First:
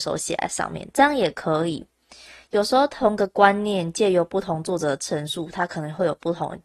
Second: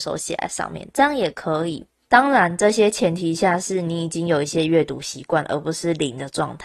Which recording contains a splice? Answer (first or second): second